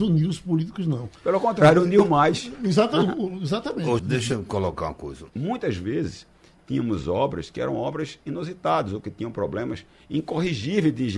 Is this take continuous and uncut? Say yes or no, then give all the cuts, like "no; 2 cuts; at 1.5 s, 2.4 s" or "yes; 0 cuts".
no; 2 cuts; at 4.0 s, 5.3 s